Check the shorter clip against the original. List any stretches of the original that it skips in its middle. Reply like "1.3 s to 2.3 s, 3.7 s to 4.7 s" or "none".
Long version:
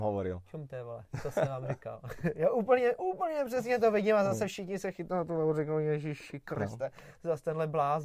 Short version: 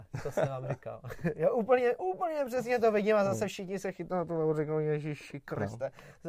none